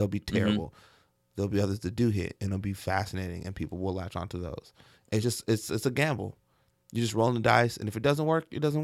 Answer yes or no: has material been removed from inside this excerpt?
no